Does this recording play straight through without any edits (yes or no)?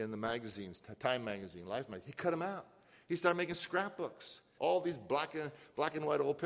no